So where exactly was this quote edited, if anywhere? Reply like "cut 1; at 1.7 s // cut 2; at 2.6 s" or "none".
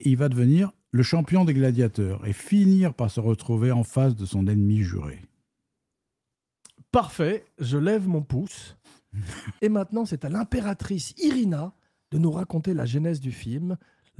none

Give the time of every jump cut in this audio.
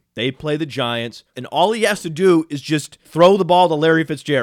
cut 1; at 1.3 s // cut 2; at 3.0 s

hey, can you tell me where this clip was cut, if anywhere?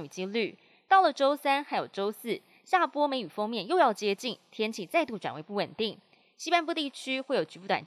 none

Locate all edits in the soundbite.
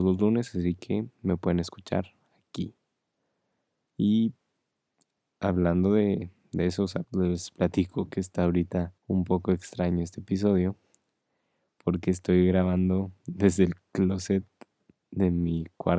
cut 1; at 7.0 s // cut 2; at 9.0 s

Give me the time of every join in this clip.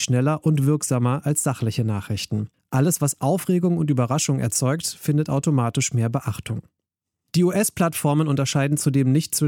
none

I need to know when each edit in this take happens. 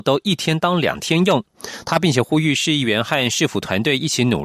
none

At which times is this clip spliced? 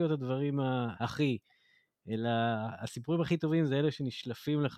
cut 1; at 0.9 s

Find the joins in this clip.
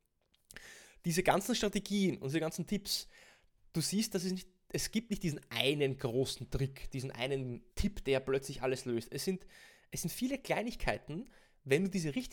cut 1; at 7.7 s

